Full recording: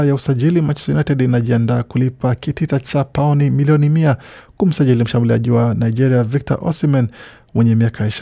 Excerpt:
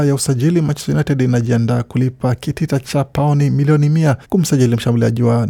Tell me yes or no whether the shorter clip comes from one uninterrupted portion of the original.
no